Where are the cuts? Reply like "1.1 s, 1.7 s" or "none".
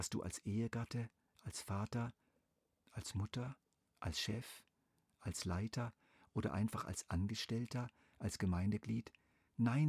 none